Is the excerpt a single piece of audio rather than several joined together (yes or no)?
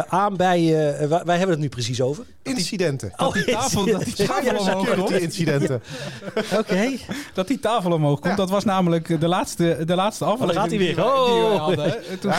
yes